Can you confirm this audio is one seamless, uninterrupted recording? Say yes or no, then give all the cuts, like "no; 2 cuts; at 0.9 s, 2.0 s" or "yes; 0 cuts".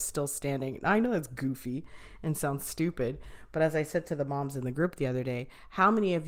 yes; 0 cuts